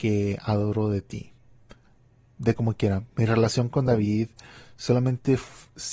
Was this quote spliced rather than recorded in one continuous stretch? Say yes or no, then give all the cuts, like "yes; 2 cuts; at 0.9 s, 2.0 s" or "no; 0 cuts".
no; 0 cuts